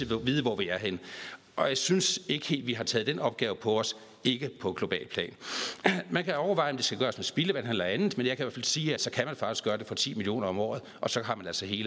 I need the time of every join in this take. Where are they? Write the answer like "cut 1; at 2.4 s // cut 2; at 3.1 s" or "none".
cut 1; at 9.0 s